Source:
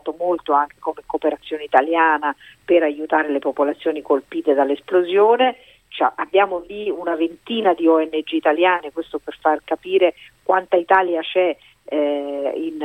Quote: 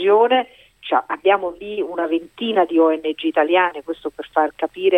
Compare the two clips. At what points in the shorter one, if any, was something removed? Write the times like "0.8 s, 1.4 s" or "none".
none